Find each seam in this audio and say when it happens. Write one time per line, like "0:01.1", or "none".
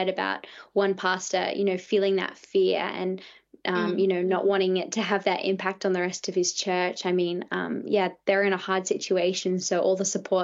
none